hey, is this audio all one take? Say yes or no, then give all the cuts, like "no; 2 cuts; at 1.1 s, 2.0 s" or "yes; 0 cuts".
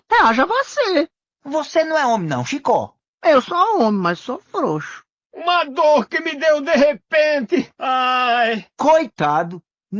no; 1 cut; at 5.2 s